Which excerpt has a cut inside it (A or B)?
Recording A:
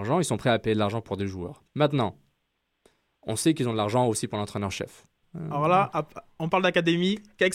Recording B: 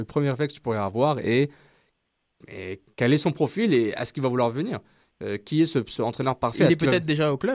A